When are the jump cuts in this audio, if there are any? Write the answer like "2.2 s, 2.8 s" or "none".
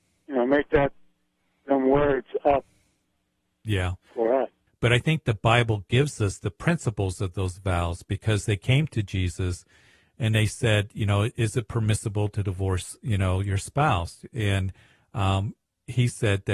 4.7 s

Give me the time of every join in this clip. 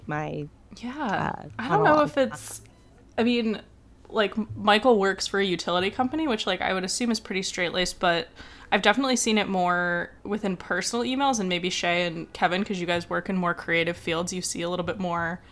10.2 s

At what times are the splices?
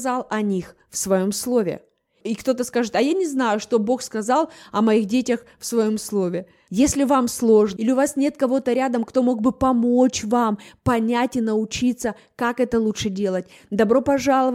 6.7 s, 7.8 s

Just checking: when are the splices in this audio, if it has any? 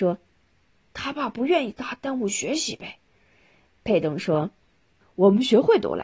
none

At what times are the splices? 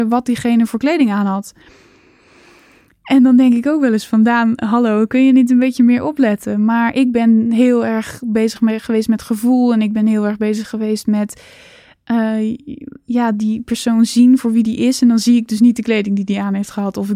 none

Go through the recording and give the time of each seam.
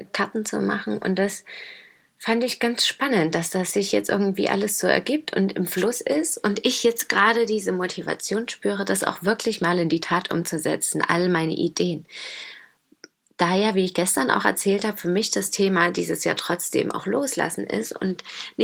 none

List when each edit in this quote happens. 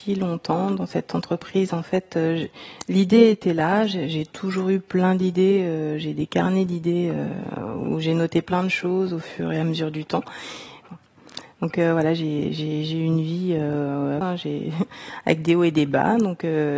10.8 s, 14.2 s

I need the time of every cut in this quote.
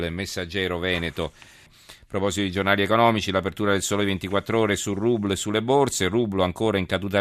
1.7 s

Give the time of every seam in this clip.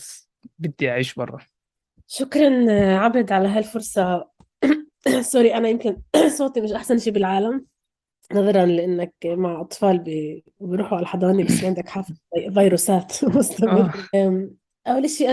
14.1 s

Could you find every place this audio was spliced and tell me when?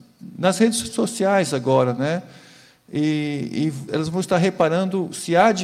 3.9 s

